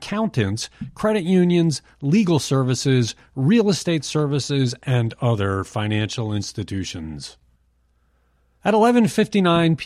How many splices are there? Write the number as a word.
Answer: zero